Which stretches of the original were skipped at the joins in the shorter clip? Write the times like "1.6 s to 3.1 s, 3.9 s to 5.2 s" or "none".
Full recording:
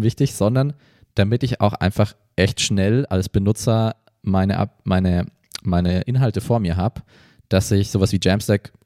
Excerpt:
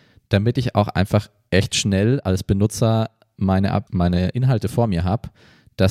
4.7 s to 5.6 s